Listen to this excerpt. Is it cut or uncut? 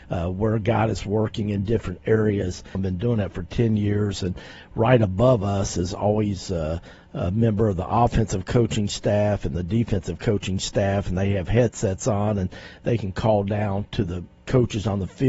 cut